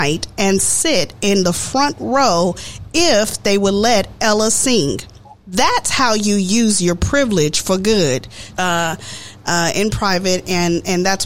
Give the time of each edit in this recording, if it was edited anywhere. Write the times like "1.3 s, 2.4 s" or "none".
5.4 s, 8.5 s